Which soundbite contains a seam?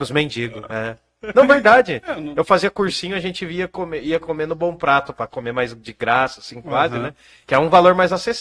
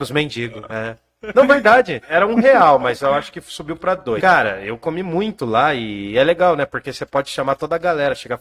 second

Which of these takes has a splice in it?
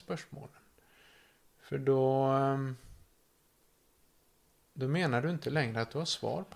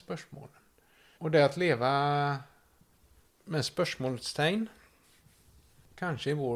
second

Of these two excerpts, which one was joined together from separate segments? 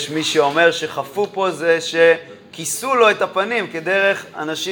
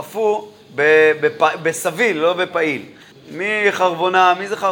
second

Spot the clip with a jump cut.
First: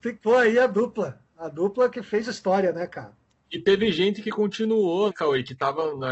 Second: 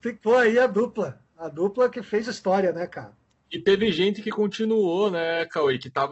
first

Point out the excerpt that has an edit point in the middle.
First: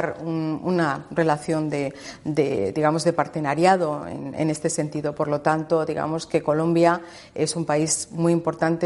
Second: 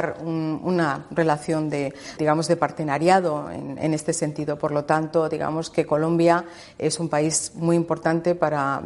second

